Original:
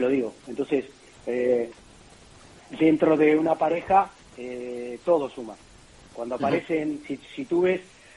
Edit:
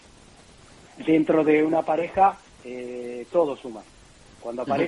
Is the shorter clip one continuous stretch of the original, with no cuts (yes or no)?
yes